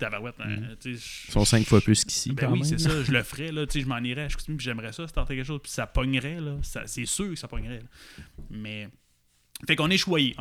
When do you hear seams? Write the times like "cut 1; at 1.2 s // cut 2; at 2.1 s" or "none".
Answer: none